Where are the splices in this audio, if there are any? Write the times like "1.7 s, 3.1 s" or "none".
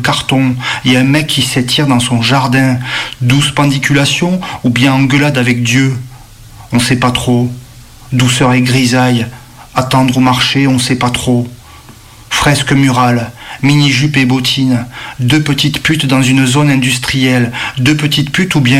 none